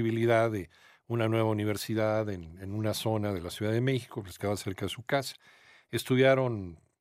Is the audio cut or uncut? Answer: uncut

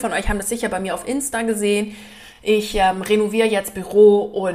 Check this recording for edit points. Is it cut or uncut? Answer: uncut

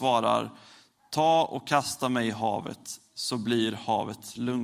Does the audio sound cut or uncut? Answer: uncut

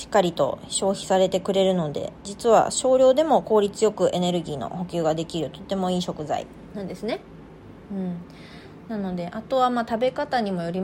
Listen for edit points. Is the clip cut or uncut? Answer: uncut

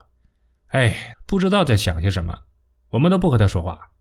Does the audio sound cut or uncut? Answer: cut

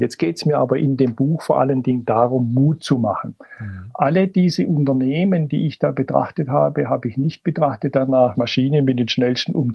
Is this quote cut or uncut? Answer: cut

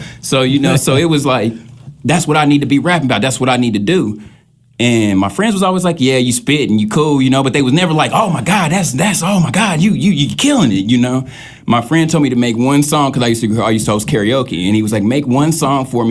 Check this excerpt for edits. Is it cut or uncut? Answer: uncut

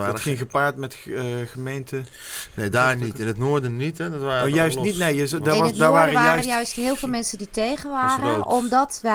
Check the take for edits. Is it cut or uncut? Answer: uncut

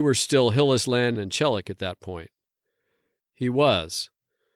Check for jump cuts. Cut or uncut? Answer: cut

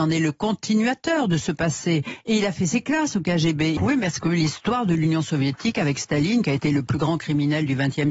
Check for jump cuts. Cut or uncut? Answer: cut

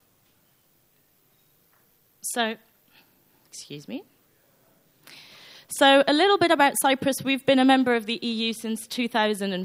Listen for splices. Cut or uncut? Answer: uncut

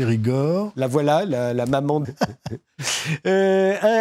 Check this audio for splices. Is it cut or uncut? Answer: cut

